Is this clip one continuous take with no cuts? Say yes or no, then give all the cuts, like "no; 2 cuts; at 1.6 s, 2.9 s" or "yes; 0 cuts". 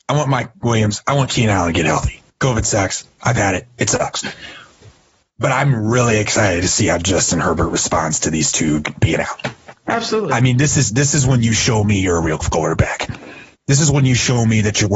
yes; 0 cuts